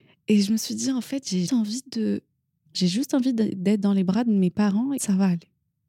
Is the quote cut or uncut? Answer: cut